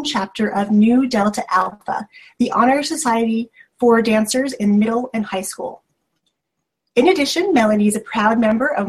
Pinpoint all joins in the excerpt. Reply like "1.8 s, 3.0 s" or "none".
none

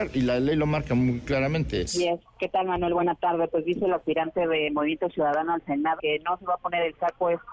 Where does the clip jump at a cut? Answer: 1.9 s, 6.0 s

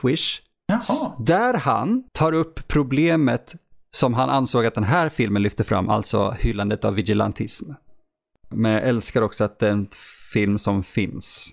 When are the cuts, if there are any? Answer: 2.1 s, 8.5 s

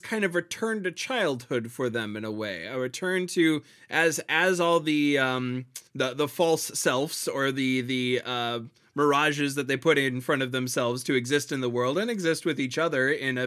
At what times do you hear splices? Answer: 5.9 s

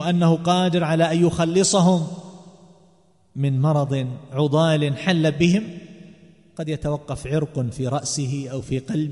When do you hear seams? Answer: none

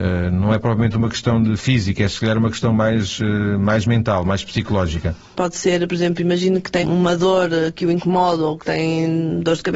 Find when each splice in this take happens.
5.3 s, 6.8 s

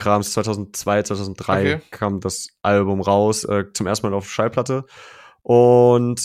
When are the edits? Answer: none

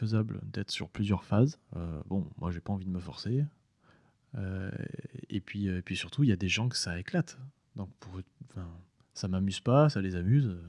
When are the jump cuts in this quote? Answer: 1.7 s

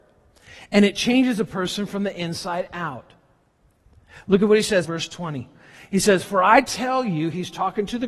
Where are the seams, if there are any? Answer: 4.9 s

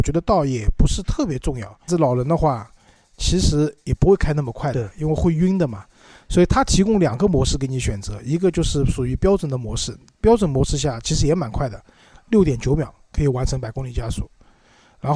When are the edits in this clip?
1.9 s

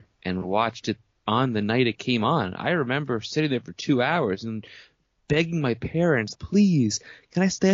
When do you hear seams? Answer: 6.3 s

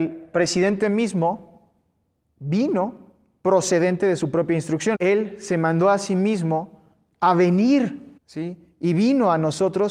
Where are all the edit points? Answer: 4.9 s, 8.2 s

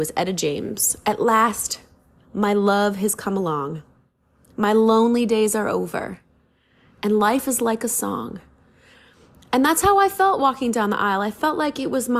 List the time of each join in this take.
none

